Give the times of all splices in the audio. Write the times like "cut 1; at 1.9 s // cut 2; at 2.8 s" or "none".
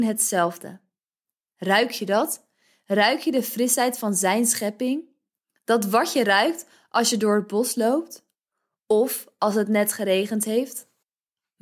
none